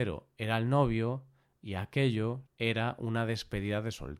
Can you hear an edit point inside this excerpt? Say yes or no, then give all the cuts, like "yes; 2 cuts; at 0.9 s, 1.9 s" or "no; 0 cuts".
yes; 1 cut; at 2.5 s